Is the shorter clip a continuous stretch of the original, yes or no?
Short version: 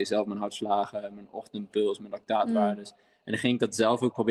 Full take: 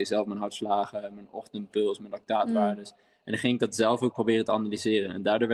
yes